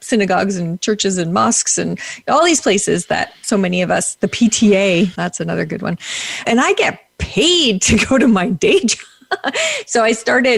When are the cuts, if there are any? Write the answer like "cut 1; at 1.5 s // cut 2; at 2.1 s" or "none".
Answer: cut 1; at 5.1 s // cut 2; at 6.4 s